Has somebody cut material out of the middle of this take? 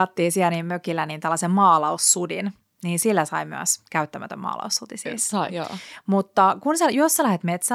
yes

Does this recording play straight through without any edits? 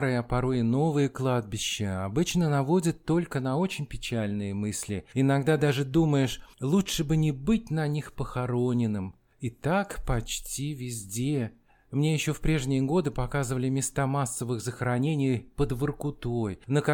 yes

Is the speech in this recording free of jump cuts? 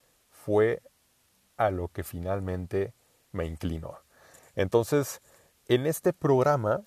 yes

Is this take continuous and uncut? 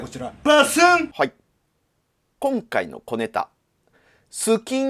yes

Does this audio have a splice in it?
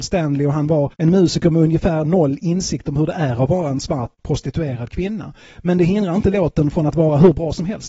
yes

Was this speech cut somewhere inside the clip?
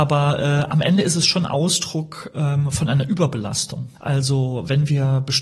yes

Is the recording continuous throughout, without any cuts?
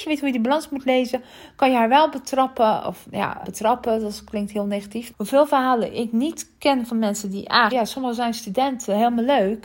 no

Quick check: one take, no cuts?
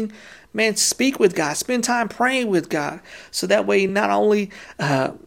yes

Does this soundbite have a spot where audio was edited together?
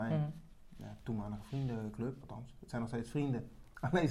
no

